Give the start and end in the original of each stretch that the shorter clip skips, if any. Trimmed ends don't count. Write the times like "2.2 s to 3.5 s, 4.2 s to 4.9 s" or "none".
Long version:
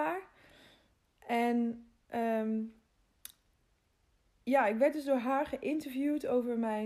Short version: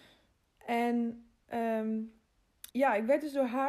3.3 s to 4.4 s